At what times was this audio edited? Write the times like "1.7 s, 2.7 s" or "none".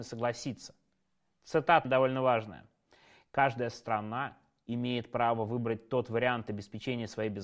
1.8 s